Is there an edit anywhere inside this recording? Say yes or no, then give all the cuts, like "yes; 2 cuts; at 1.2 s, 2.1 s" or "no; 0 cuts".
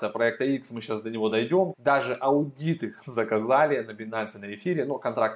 yes; 1 cut; at 1.7 s